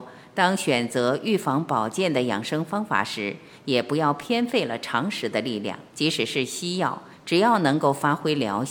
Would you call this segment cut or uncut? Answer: cut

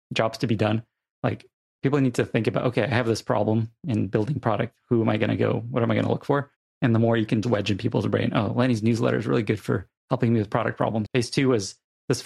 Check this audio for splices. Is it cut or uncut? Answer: cut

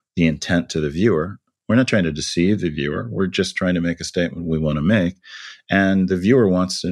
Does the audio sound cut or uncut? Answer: uncut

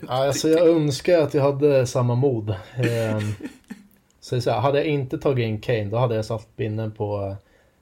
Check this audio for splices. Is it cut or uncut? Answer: uncut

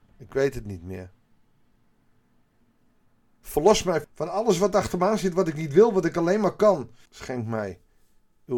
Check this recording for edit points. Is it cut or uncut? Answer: cut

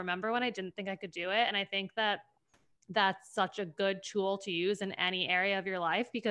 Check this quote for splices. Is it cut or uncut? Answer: uncut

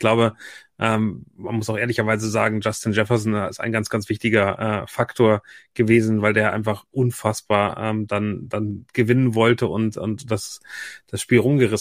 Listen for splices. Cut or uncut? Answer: uncut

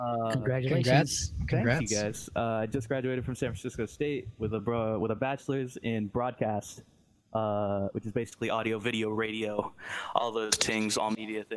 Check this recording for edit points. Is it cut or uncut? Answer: uncut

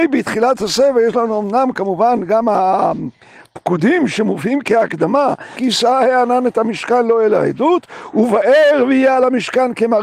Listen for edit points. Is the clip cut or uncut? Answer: cut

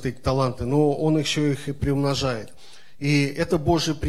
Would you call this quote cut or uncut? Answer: cut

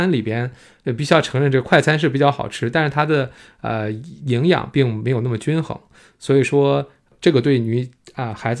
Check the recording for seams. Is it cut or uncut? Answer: uncut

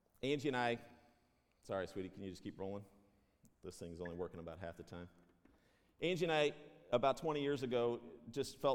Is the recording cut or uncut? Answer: uncut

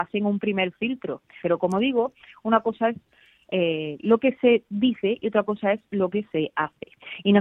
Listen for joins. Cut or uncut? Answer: cut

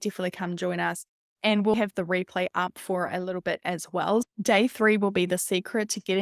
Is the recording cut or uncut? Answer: cut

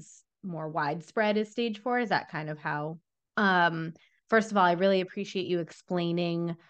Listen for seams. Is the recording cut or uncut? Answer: cut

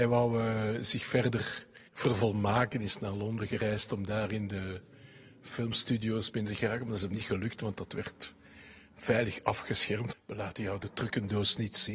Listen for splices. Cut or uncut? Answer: cut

